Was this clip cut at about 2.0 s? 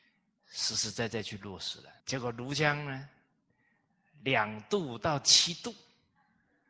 yes; 1 cut; at 2.0 s

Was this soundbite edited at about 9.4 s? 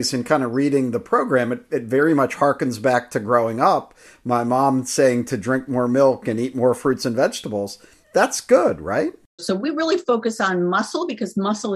yes; 1 cut; at 9.4 s

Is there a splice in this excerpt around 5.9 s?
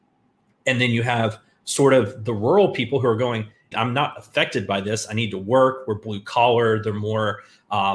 no; 1 cut; at 3.7 s

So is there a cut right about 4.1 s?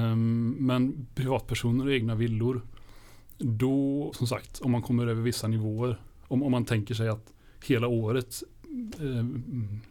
yes; 1 cut; at 4.1 s

